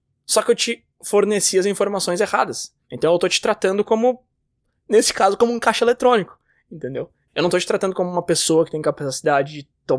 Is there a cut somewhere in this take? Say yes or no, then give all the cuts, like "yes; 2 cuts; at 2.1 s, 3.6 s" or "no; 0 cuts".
yes; 1 cut; at 2.8 s